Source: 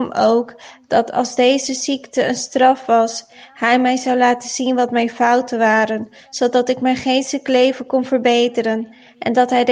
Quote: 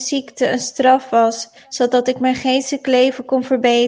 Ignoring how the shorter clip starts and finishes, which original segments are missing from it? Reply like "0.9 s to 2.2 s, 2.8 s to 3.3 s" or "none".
3.3 s to 6.2 s